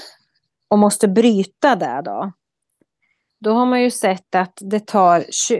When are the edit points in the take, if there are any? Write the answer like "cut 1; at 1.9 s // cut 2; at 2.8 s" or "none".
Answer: none